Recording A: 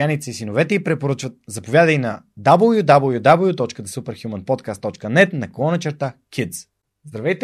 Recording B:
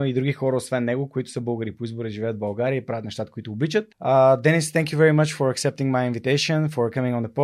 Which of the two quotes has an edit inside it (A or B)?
B